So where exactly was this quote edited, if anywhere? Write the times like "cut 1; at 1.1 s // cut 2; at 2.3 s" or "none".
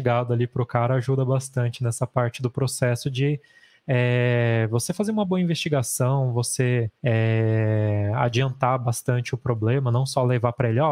cut 1; at 7.0 s